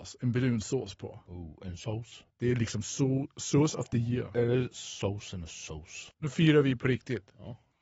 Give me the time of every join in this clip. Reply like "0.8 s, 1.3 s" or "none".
2.3 s, 6.1 s